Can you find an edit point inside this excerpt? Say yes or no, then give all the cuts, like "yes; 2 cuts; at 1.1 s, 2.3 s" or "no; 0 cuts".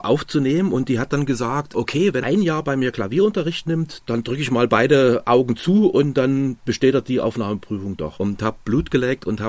yes; 2 cuts; at 2.2 s, 8.1 s